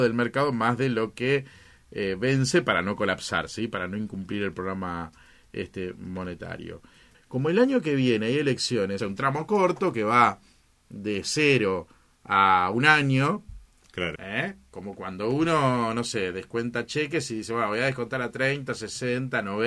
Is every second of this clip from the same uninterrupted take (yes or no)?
no